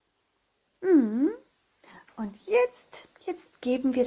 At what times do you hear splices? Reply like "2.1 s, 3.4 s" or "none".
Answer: 3.1 s